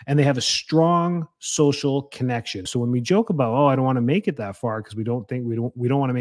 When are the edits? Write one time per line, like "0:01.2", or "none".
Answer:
0:02.7